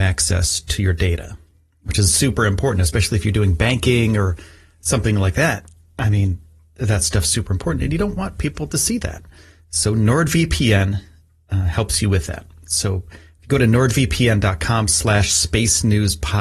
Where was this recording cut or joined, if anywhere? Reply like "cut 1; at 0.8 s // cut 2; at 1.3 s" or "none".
none